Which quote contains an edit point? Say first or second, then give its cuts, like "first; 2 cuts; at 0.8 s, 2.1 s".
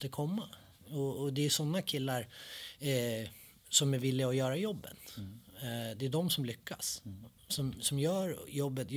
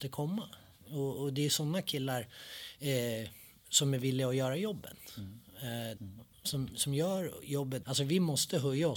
second; 2 cuts; at 6.0 s, 7.8 s